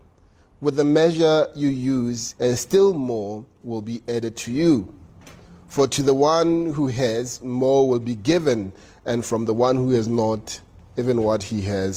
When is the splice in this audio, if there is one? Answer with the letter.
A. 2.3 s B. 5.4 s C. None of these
A